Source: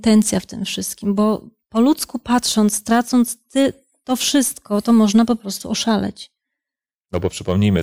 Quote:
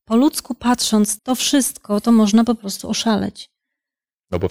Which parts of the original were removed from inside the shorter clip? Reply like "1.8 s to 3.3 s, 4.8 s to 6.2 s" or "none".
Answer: 2.8 s to 4.0 s